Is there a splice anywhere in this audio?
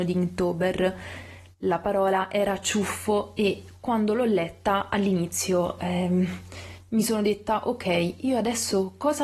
no; 0 cuts

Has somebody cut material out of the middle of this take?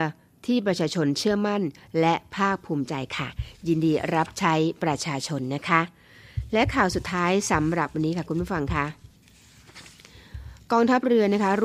no; 0 cuts

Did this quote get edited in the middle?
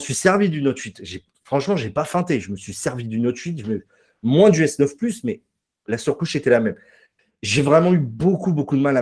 no; 0 cuts

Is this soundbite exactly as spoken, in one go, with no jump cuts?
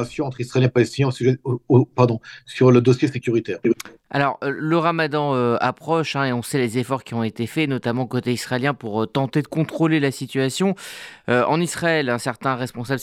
yes; 0 cuts

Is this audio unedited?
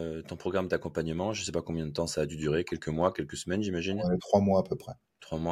yes; 0 cuts

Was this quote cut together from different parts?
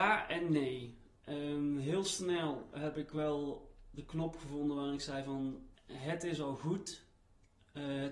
yes; 1 cut; at 5.7 s

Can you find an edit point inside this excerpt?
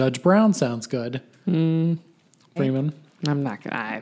yes; 1 cut; at 2.6 s

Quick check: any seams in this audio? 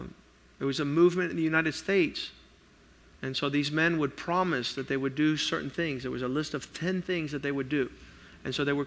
no; 0 cuts

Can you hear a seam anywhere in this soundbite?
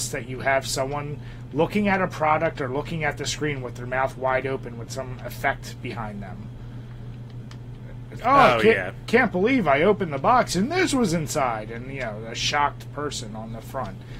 yes; 1 cut; at 8.2 s

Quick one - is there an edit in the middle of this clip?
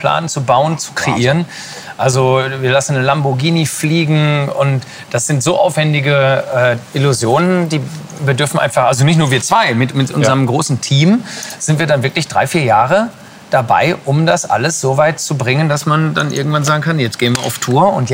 no; 0 cuts

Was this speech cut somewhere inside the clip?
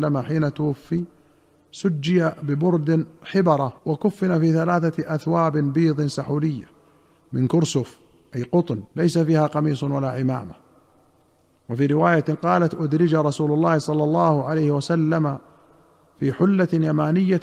yes; 2 cuts; at 3.8 s, 8.9 s

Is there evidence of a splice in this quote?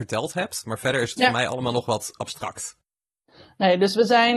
no; 0 cuts

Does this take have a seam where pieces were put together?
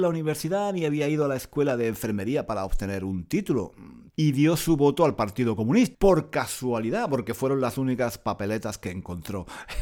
yes; 2 cuts; at 4.1 s, 5.9 s

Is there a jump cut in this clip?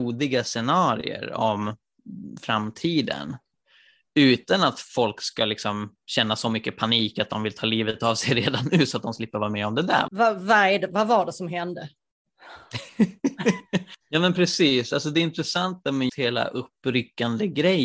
yes; 2 cuts; at 10.1 s, 16.1 s

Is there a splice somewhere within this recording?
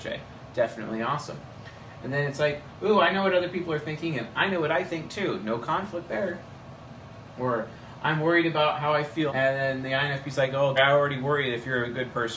yes; 2 cuts; at 9.3 s, 10.8 s

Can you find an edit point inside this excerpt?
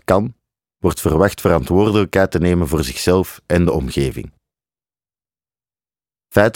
no; 0 cuts

